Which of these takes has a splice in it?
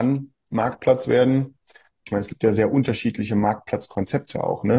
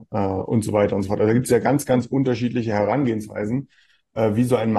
first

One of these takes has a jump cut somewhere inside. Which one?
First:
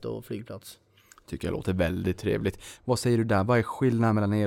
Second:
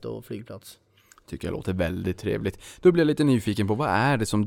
first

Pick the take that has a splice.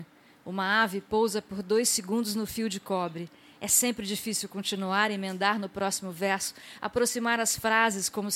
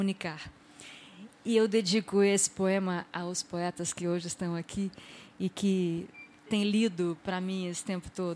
second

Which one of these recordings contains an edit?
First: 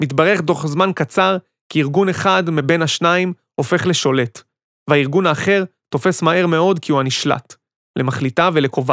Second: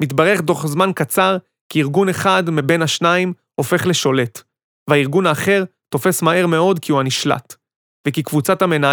first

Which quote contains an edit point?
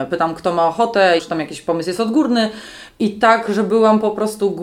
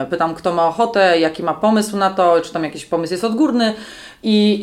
first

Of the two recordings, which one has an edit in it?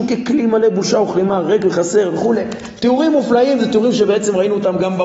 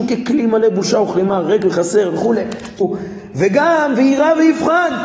second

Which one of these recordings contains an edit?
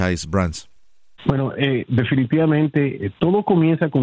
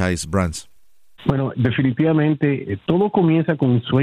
second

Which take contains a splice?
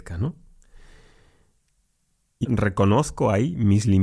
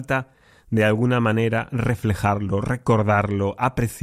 first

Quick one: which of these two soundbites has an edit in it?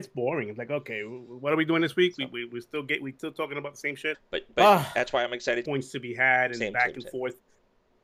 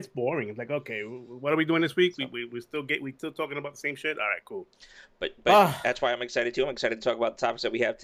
first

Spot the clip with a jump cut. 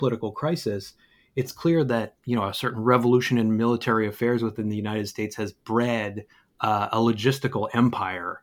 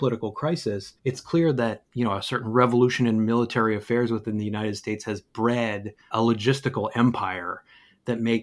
second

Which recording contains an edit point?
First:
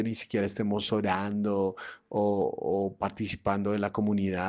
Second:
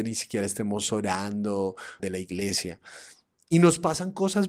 second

